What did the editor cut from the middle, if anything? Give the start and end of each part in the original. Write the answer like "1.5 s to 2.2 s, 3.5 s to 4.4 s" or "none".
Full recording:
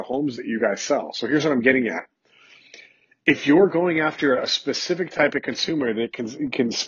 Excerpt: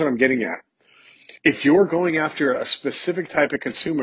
2.8 s to 3.2 s